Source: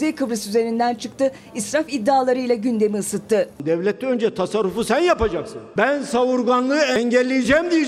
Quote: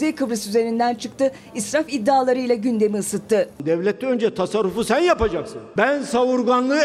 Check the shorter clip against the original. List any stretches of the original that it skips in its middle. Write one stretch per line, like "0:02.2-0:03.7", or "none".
none